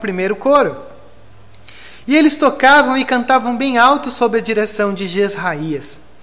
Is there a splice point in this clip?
yes; 1 cut; at 1.9 s

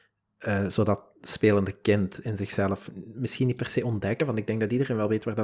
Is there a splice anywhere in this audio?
no; 0 cuts

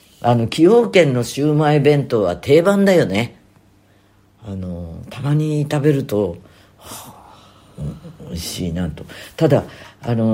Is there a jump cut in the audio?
no; 0 cuts

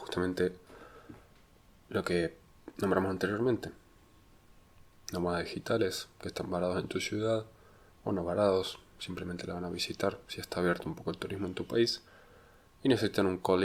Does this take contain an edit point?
no; 0 cuts

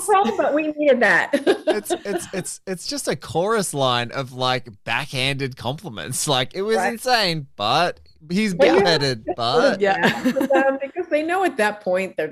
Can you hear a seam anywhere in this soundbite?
no; 0 cuts

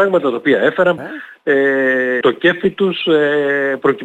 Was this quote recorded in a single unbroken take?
no; 2 cuts; at 1.0 s, 2.2 s

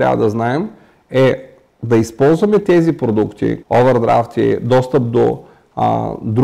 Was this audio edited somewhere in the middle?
yes; 1 cut; at 3.6 s

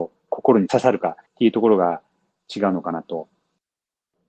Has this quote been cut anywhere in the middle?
yes; 1 cut; at 1.3 s

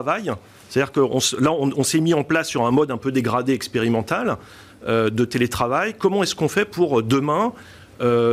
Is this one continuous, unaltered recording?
yes; 0 cuts

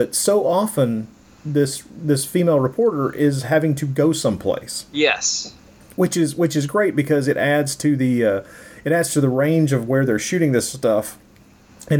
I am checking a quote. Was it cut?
no; 0 cuts

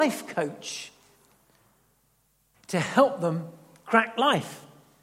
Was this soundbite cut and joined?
no; 0 cuts

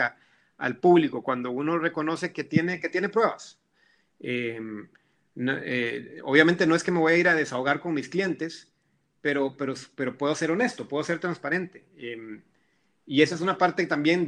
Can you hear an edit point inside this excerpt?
no; 0 cuts

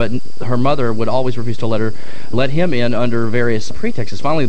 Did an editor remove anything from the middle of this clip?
no; 0 cuts

